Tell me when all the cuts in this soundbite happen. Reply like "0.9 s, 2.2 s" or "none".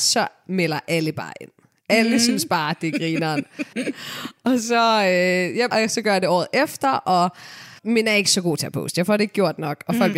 3.7 s, 5.7 s, 7.8 s